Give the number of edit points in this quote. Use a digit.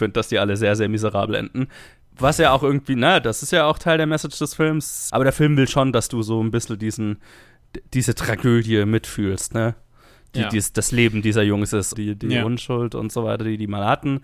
2